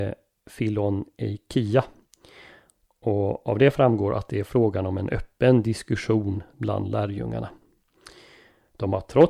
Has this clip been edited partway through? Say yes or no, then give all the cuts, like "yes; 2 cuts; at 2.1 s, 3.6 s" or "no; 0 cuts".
yes; 1 cut; at 6.5 s